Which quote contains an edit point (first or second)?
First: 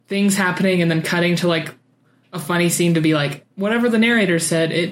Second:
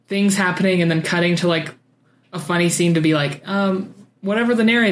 first